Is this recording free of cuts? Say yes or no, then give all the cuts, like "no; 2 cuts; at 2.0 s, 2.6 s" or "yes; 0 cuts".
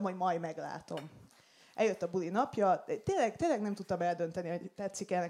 yes; 0 cuts